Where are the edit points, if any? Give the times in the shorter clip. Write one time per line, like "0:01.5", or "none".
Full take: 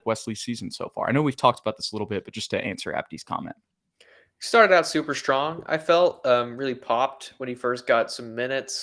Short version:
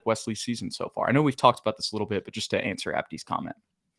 none